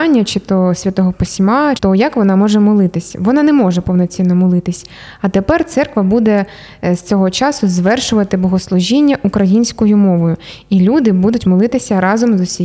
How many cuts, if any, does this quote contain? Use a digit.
1